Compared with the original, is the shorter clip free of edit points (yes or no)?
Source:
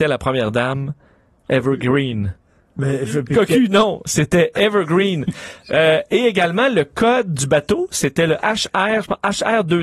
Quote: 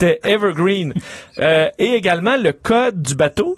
yes